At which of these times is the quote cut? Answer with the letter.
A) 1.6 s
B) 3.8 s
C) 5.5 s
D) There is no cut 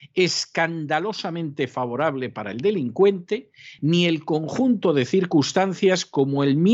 B